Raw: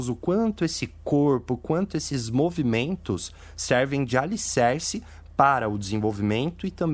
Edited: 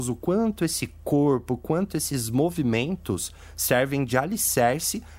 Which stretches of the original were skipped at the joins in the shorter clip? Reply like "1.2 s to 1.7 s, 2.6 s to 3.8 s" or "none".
none